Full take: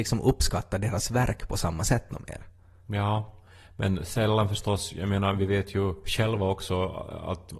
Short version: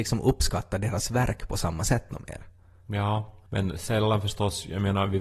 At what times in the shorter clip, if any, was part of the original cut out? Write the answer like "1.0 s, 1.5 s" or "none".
3.5 s